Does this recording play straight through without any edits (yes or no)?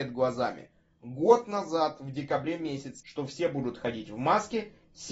no